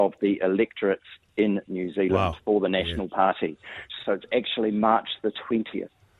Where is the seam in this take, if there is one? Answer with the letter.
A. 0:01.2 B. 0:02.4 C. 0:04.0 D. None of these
C